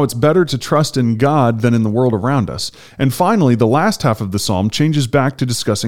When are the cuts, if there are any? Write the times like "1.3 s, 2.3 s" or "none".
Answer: none